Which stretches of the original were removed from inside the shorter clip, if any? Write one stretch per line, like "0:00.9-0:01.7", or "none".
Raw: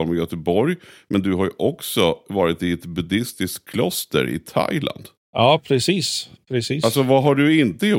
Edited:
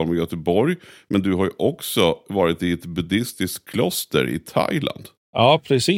none